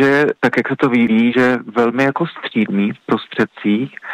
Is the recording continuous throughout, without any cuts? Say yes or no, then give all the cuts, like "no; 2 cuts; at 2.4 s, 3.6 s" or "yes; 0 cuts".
no; 1 cut; at 1.3 s